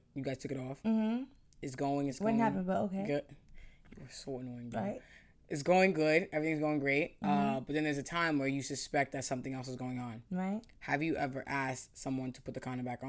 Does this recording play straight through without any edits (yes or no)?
yes